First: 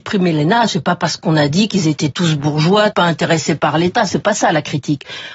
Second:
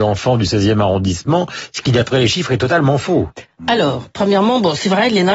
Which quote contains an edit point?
first; 1 cut; at 2.9 s

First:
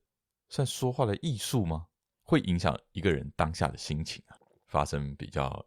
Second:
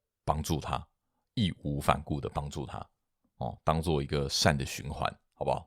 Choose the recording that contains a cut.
first; 1 cut; at 4.7 s

